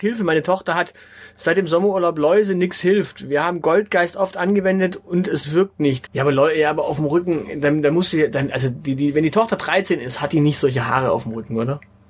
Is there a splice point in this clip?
yes; 1 cut; at 6.1 s

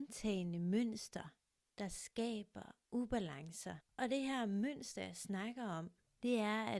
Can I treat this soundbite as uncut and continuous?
yes; 0 cuts

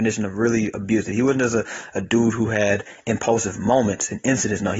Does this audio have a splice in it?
no; 0 cuts

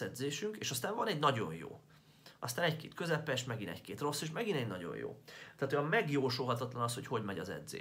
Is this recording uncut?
yes; 0 cuts

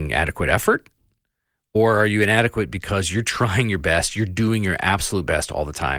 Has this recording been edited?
no; 0 cuts

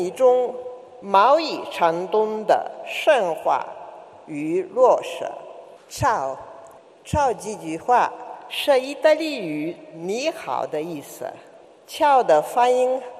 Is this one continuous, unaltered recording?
yes; 0 cuts

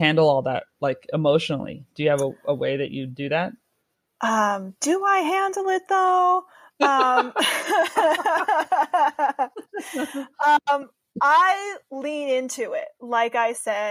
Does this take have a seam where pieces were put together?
no; 0 cuts

